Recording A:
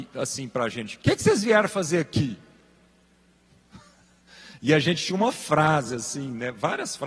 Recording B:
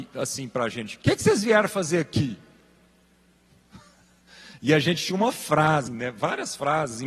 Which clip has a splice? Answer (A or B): B